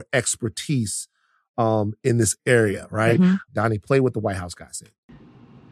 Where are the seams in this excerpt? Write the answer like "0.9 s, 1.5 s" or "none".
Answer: 3.5 s